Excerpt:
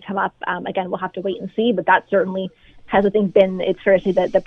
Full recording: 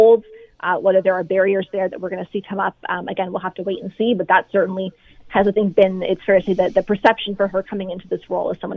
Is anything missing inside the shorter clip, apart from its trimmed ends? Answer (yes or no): no